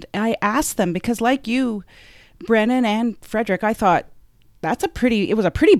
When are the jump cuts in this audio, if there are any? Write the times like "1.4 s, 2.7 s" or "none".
none